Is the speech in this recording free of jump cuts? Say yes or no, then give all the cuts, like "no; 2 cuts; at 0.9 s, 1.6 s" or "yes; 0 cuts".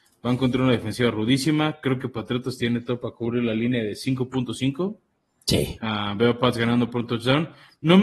yes; 0 cuts